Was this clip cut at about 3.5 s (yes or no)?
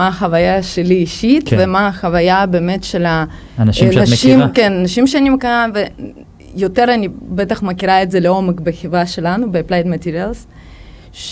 no